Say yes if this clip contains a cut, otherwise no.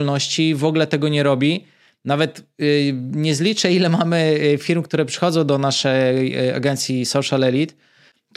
no